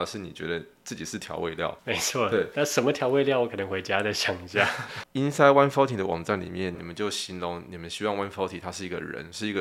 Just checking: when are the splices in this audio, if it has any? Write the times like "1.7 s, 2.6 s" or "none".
5.0 s, 6.7 s